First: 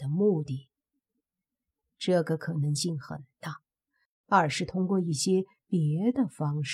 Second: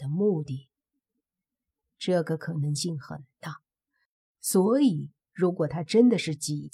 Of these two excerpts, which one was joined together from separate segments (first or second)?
first